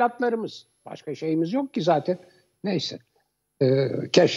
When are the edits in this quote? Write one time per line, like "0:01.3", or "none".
none